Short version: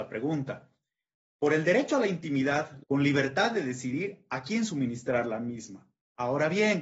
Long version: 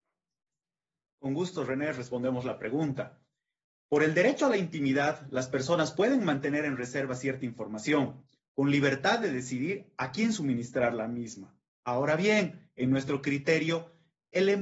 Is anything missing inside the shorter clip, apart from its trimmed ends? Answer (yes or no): yes